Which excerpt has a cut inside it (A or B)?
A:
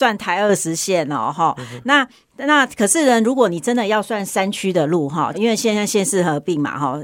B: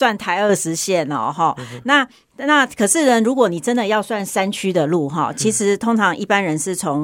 A